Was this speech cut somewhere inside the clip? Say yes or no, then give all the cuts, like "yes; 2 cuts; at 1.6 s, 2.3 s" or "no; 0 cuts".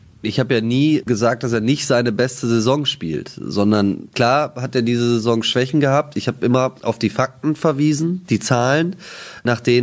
no; 0 cuts